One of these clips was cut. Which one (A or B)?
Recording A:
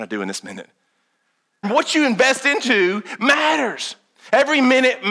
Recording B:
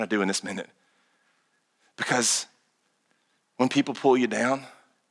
A